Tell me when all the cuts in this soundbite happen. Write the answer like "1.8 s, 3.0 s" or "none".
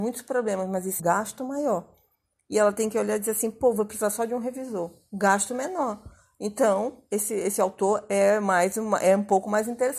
1.0 s

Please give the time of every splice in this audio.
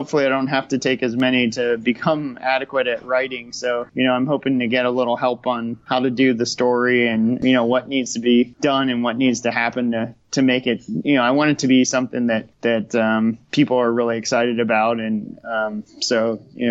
none

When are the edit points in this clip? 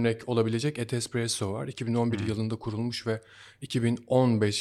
none

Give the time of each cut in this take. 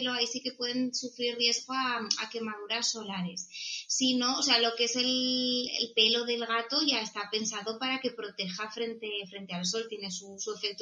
none

